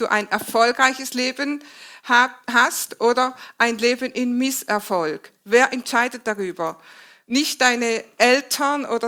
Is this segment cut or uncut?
uncut